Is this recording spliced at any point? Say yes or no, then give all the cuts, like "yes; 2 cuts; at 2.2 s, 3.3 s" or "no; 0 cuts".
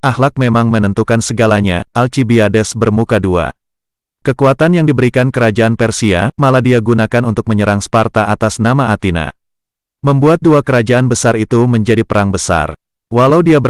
yes; 1 cut; at 1.9 s